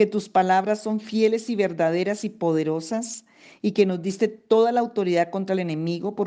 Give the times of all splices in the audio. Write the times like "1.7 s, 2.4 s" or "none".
none